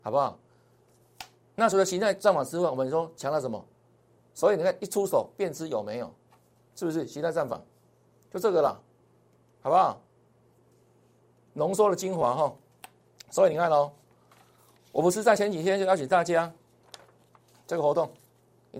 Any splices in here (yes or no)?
yes